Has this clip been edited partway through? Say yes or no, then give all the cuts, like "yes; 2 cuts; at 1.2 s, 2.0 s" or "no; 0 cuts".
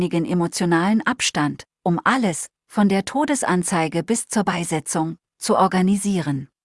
no; 0 cuts